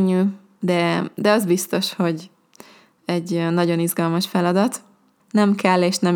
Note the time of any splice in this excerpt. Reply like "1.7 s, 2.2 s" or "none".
5.2 s